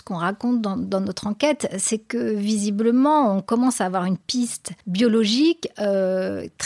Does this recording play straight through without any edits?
no; 1 cut; at 4.8 s

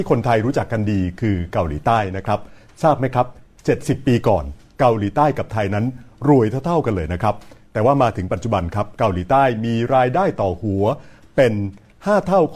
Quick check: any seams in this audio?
no; 0 cuts

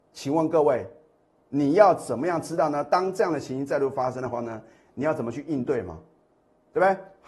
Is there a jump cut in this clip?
no; 0 cuts

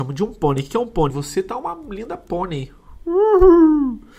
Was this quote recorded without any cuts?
no; 1 cut; at 1.1 s

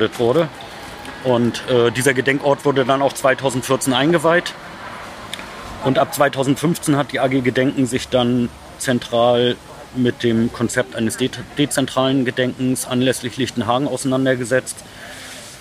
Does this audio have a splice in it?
no; 0 cuts

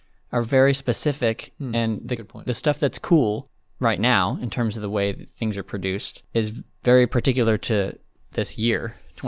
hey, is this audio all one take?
yes; 0 cuts

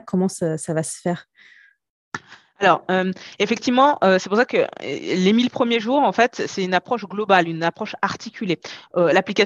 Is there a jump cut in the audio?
no; 0 cuts

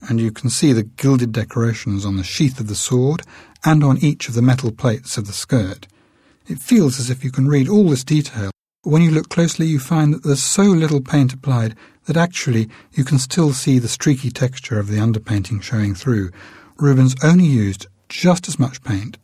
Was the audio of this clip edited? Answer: no; 0 cuts

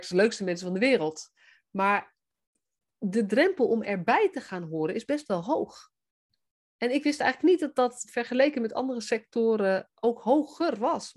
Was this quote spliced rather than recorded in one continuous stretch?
no; 0 cuts

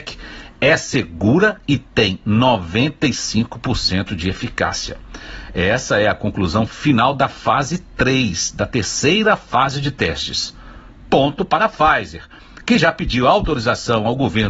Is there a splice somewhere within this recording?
no; 0 cuts

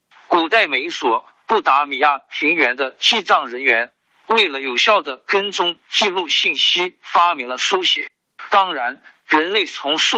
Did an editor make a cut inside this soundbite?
yes; 1 cut; at 8.5 s

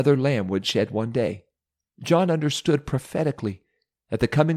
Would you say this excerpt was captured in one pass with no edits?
no; 1 cut; at 1.9 s

